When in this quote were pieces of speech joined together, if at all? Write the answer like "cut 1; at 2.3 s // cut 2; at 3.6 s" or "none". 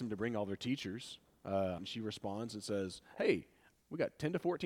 cut 1; at 1.8 s